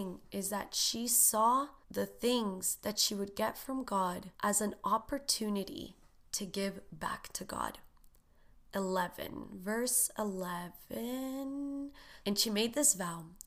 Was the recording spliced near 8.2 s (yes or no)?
no